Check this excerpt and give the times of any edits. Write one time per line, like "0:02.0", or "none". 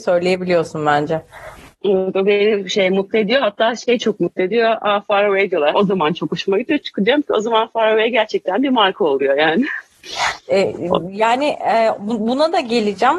0:05.7